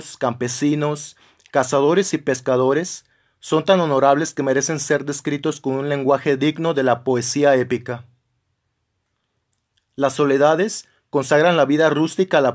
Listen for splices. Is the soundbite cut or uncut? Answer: uncut